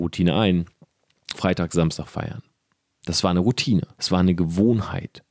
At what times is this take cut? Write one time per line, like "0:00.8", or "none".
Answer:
0:01.3
0:03.9

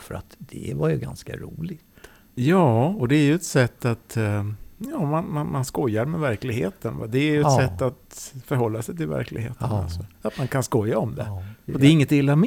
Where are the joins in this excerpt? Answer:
none

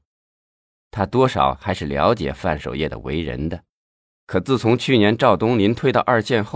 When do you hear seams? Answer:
0:04.2

